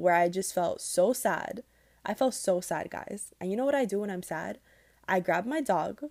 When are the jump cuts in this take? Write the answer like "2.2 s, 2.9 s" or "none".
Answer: none